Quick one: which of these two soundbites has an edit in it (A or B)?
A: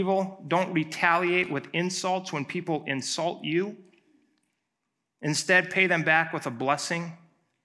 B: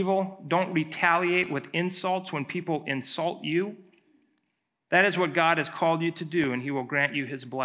B